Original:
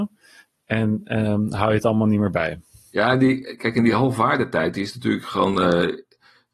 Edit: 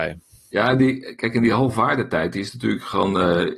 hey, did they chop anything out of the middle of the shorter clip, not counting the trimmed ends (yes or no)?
no